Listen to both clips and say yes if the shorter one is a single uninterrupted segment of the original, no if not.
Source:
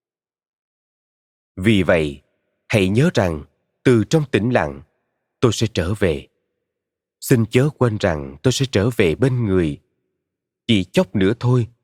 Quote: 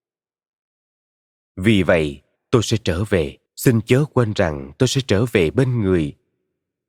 no